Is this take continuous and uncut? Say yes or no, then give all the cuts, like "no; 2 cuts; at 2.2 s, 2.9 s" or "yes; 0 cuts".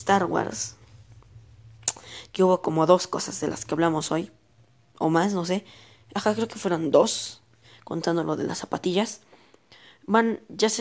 yes; 0 cuts